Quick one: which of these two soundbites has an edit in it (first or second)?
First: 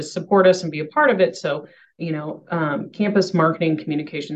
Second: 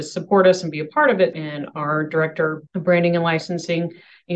second